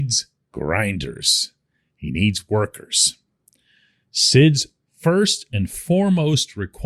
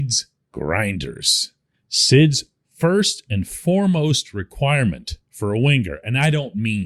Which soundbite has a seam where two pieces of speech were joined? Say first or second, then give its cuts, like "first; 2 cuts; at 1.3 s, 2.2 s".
second; 1 cut; at 1.7 s